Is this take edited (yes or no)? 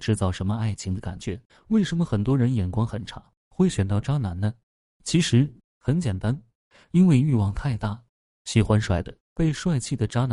yes